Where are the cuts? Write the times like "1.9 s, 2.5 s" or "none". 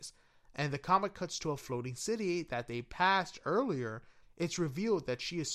4.2 s

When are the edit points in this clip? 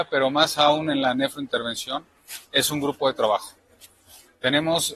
none

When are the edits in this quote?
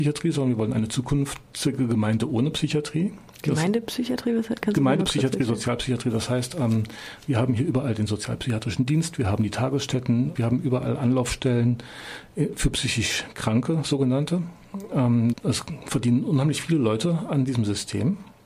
10.4 s, 15.3 s

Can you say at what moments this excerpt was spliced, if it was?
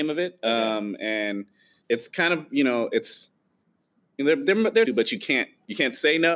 1.8 s, 4.9 s

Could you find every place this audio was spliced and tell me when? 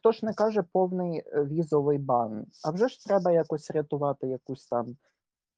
none

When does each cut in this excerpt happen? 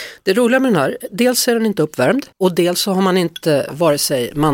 2.3 s

